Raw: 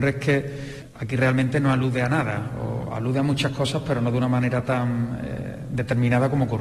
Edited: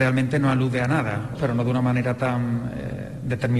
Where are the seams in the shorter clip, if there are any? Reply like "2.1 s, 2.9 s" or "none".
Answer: 1.3 s